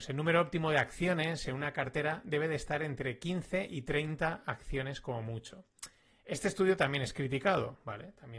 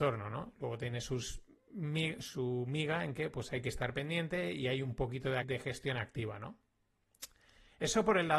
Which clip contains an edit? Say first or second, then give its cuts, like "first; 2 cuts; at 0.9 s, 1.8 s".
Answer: second; 1 cut; at 5.4 s